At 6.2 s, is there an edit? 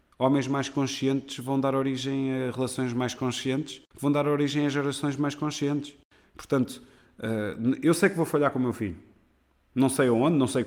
no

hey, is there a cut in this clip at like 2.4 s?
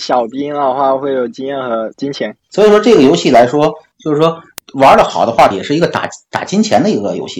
no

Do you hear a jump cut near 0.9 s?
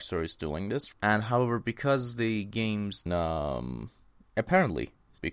yes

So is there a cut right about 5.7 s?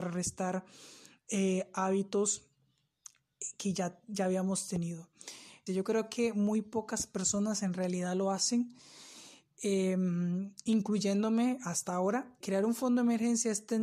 yes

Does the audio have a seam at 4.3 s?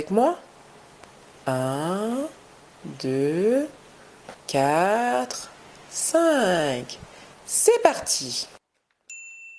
yes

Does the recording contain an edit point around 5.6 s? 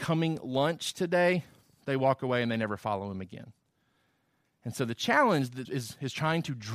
yes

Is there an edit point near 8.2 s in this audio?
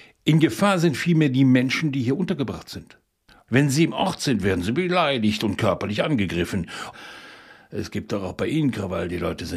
no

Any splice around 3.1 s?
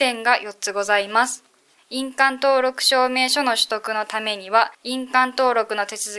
no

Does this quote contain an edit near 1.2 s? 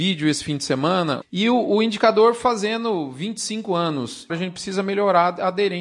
yes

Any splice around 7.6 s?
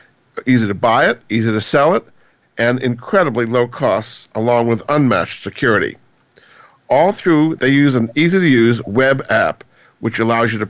yes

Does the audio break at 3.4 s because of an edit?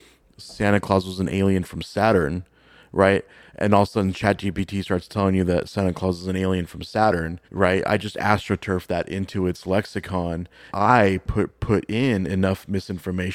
no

